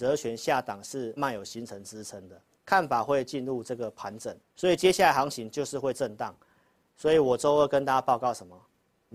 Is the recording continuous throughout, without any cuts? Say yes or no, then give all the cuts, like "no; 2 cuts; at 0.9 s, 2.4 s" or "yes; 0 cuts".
no; 3 cuts; at 1.2 s, 2.5 s, 4.4 s